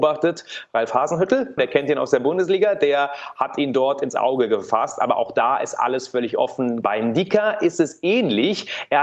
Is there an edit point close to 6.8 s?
yes; 2 cuts; at 1.6 s, 6.8 s

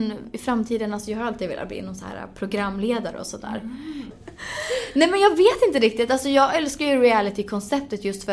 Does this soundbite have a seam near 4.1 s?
yes; 1 cut; at 4.1 s

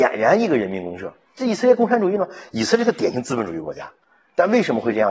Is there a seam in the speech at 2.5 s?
no; 0 cuts

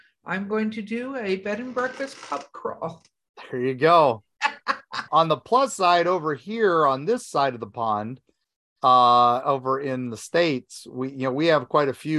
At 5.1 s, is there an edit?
yes; 1 cut; at 5.1 s

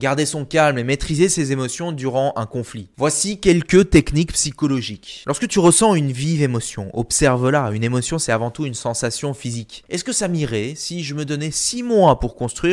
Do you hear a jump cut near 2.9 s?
no; 1 cut; at 9.8 s

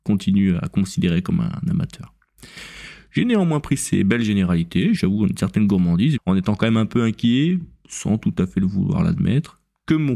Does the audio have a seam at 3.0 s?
no; 2 cuts; at 5.0 s, 6.2 s

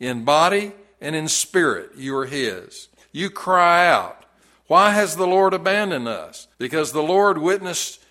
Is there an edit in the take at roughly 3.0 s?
yes; 2 cuts; at 3.0 s, 6.5 s

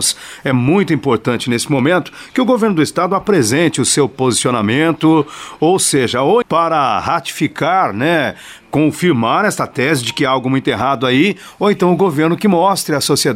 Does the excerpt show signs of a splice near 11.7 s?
no; 1 cut; at 6.4 s

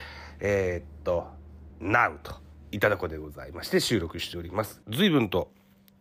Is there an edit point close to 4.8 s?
yes; 2 cuts; at 1.7 s, 4.8 s

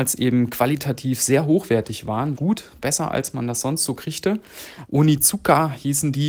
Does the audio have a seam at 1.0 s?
no; 2 cuts; at 2.4 s, 4.8 s

